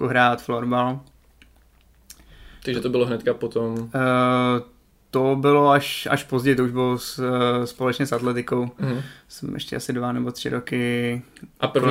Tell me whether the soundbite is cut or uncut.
uncut